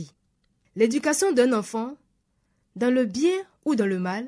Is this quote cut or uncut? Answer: uncut